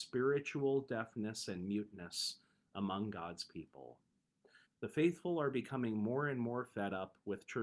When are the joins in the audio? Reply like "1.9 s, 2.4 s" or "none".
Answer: 4.7 s